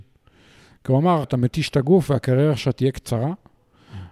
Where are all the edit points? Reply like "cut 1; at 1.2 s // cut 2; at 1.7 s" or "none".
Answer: cut 1; at 1.2 s